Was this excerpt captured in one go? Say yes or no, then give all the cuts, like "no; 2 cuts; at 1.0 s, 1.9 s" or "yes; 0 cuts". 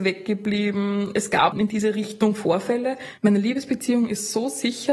no; 2 cuts; at 1.5 s, 3.2 s